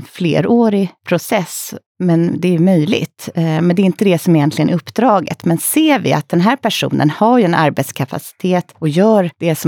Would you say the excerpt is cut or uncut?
uncut